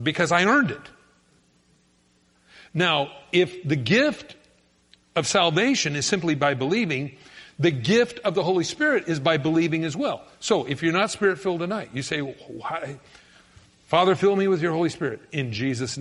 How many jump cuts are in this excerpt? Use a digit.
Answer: 0